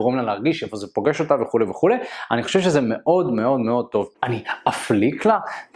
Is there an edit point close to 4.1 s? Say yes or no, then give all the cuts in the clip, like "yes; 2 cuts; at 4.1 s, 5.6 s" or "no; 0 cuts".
yes; 1 cut; at 4.1 s